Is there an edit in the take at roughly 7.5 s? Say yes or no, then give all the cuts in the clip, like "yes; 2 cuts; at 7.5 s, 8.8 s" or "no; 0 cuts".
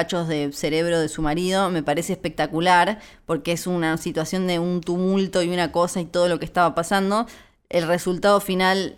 no; 0 cuts